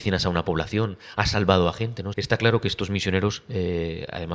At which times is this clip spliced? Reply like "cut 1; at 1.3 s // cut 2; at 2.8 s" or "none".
cut 1; at 2.1 s